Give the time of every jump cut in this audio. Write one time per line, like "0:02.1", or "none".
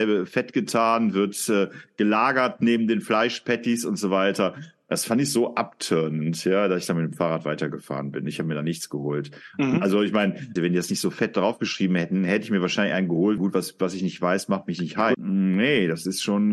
0:10.6
0:13.4
0:15.1